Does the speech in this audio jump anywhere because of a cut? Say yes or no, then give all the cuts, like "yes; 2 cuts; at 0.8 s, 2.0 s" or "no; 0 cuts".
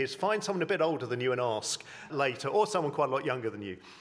yes; 1 cut; at 2.1 s